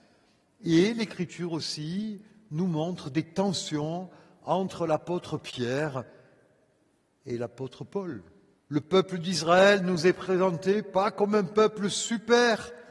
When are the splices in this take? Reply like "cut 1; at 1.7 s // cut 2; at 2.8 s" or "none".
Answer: cut 1; at 8.6 s